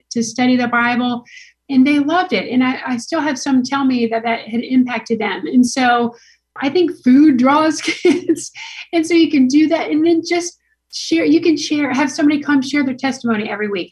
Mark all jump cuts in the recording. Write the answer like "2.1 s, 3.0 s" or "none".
none